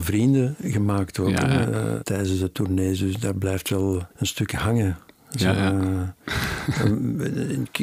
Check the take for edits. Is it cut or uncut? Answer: cut